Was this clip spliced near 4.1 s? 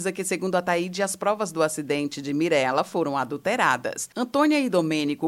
yes; 1 cut; at 4.1 s

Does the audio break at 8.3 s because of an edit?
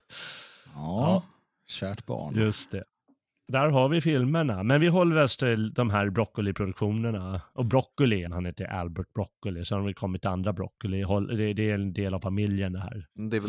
yes; 1 cut; at 8.3 s

